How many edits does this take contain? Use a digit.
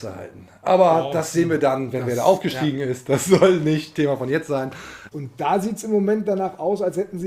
1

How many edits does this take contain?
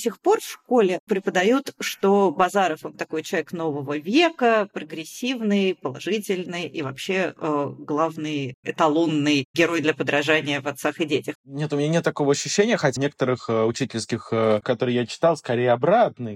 3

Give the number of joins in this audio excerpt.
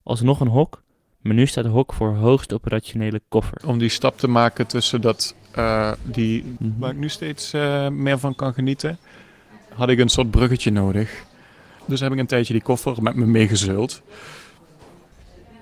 2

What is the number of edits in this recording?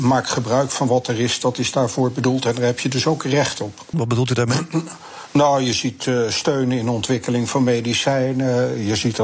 1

